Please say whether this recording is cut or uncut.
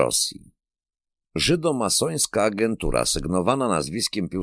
cut